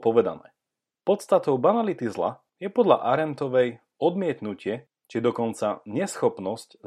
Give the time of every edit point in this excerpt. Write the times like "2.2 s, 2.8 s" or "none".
0.9 s, 2.5 s